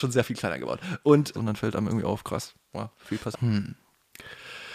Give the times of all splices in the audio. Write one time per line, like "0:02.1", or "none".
0:01.3
0:03.3